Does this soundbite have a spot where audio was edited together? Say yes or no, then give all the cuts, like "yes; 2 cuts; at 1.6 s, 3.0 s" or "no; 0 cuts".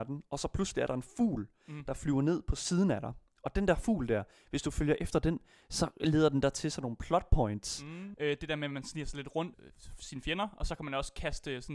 yes; 2 cuts; at 8.1 s, 9.5 s